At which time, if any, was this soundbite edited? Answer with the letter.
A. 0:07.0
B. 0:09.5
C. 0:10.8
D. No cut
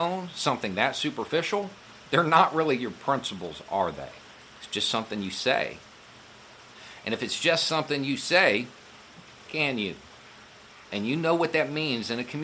B